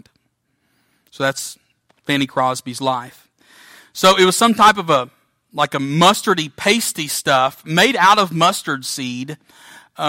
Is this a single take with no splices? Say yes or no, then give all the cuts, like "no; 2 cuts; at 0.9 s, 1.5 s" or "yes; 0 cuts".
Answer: no; 1 cut; at 3.8 s